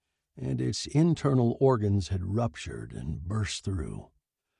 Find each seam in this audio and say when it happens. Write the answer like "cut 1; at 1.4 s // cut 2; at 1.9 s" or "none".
none